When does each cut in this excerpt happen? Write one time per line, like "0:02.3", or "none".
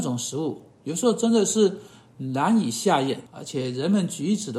0:03.3